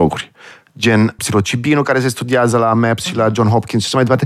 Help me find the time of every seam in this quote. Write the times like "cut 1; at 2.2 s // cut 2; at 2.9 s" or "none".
cut 1; at 1.2 s